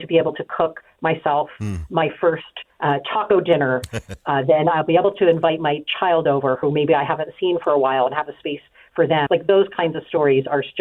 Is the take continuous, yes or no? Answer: no